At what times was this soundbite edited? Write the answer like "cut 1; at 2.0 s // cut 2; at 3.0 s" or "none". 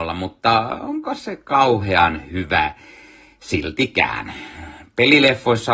none